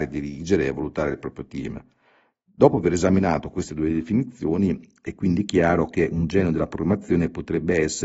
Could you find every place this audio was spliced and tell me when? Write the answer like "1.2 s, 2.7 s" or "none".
none